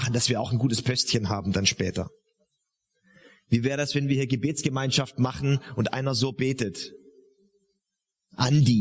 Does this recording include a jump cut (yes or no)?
no